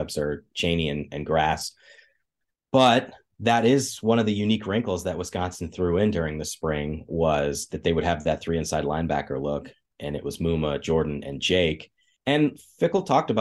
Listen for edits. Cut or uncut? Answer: uncut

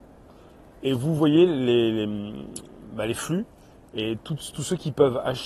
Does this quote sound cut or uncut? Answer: uncut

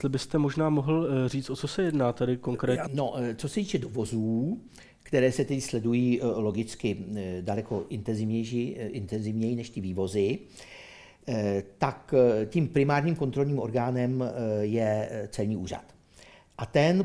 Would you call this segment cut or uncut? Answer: cut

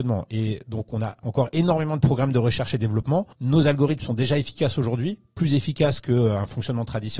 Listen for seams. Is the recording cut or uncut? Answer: cut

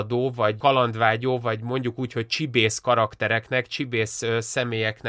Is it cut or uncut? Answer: uncut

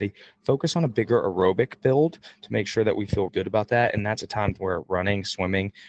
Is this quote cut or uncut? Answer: cut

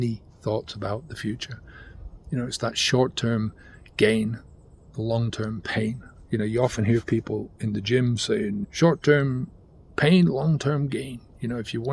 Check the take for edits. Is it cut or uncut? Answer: cut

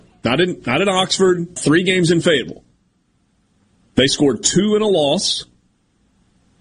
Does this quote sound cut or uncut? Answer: cut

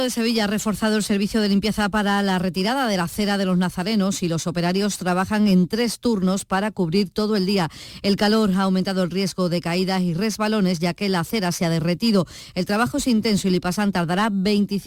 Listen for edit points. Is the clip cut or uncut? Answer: uncut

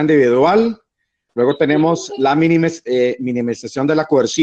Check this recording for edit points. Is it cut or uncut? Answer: cut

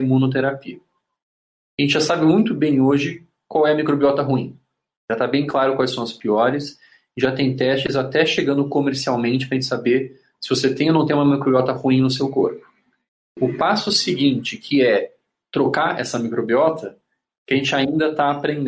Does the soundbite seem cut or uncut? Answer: uncut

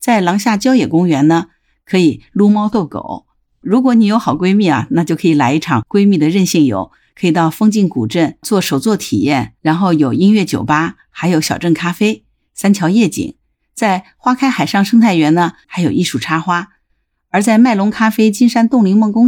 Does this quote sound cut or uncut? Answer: cut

